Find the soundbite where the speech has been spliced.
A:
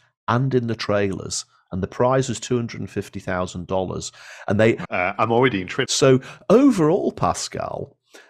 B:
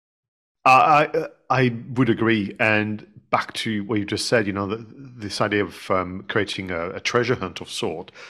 A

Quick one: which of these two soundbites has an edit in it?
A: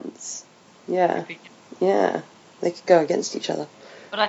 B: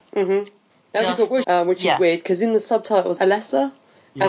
B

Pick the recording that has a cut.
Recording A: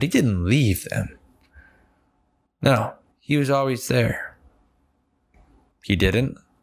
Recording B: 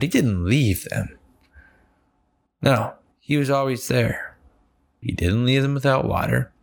B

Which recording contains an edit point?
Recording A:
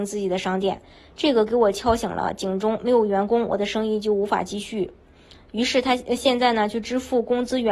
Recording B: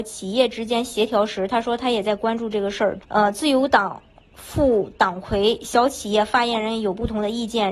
B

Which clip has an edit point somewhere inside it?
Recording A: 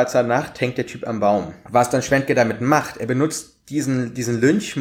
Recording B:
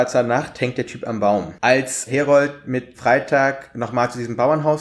B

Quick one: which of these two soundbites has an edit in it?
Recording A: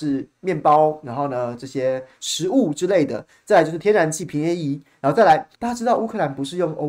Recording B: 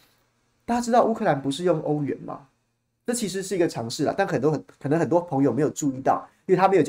A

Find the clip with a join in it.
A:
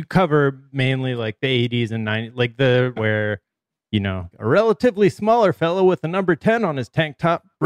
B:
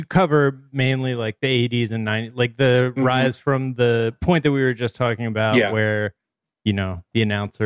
A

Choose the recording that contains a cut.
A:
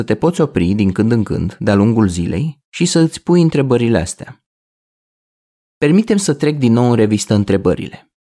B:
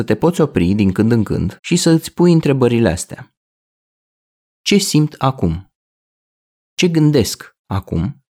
B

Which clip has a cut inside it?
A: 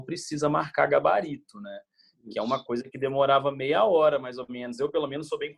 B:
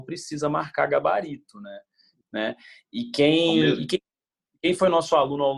B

